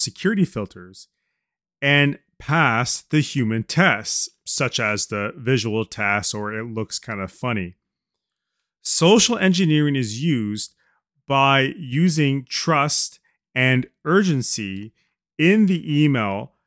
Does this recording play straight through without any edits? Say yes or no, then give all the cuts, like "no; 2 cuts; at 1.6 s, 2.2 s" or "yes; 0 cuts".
yes; 0 cuts